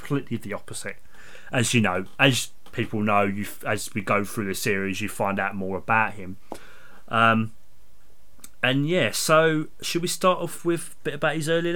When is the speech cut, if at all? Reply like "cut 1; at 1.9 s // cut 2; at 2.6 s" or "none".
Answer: none